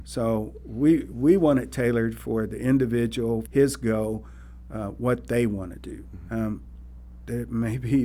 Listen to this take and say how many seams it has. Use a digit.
2